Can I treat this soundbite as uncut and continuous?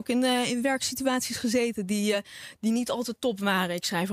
yes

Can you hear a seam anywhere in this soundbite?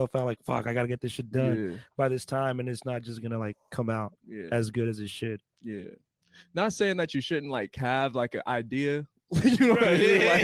no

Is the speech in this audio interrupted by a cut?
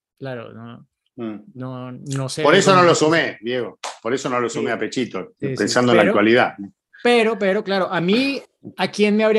no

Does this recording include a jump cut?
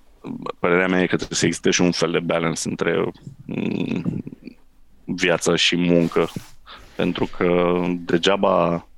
no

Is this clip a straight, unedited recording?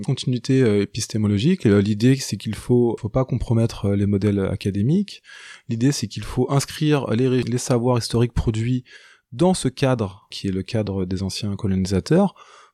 yes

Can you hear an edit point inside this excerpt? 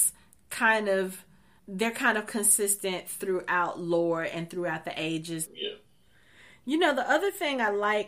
yes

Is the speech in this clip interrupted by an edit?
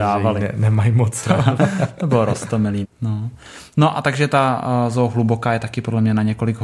yes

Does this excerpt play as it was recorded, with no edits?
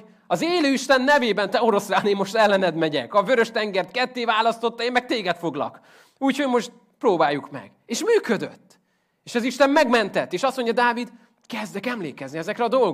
yes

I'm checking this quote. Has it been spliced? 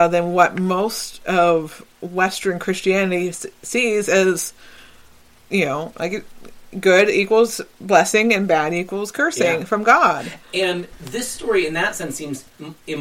no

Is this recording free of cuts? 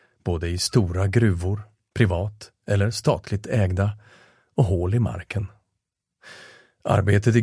yes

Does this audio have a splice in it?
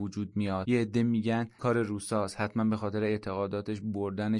yes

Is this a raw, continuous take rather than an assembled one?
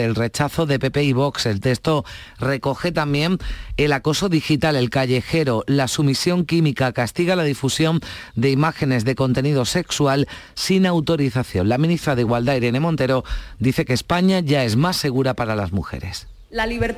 yes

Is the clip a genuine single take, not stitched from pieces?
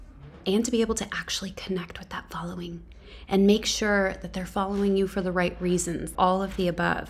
no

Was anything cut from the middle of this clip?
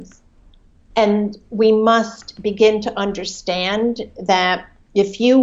yes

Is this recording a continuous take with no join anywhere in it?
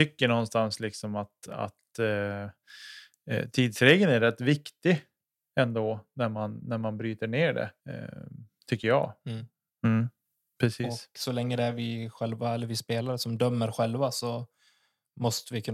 no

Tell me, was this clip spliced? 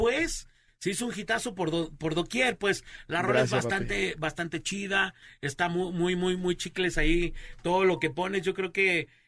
no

